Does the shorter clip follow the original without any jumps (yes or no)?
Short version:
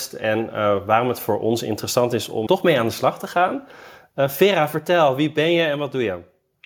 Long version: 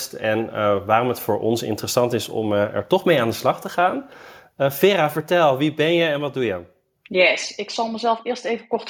no